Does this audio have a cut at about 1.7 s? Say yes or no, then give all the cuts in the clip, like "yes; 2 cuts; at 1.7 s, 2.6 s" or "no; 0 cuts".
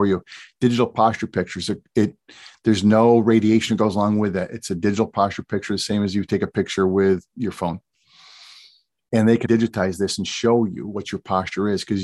no; 1 cut; at 9.4 s